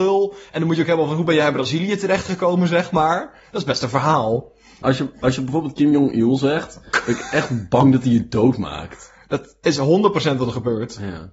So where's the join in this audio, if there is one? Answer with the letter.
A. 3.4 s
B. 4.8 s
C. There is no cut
B